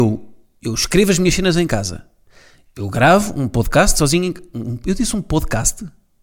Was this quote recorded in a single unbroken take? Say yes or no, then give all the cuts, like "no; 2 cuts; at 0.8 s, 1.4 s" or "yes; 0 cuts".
yes; 0 cuts